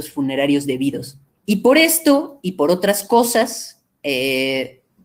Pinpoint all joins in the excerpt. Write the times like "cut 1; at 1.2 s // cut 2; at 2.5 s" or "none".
cut 1; at 1.3 s

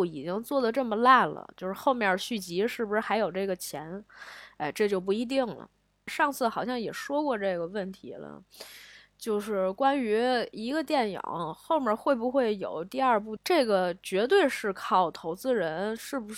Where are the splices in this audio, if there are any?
cut 1; at 6.1 s // cut 2; at 13.4 s

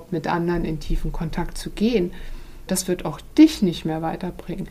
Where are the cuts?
cut 1; at 2.7 s

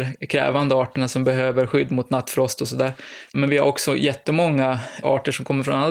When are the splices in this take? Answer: cut 1; at 3.3 s

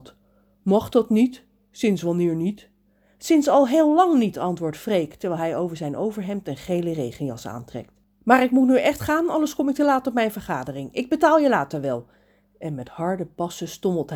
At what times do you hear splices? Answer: none

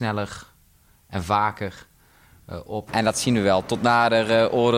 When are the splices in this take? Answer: cut 1; at 2.9 s

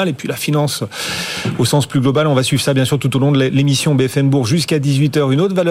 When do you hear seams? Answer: none

